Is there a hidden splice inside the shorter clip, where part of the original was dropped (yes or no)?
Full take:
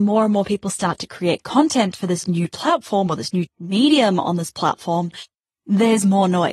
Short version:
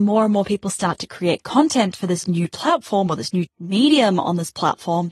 no